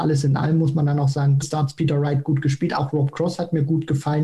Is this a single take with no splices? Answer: no; 1 cut; at 1.4 s

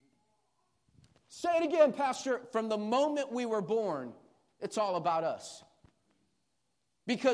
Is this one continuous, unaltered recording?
yes; 0 cuts

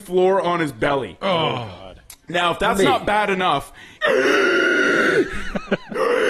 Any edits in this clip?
yes; 1 cut; at 4.0 s

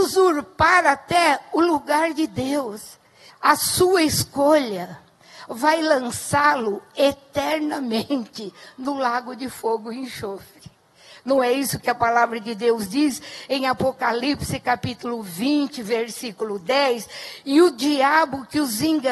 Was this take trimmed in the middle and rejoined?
yes; 1 cut; at 3.3 s

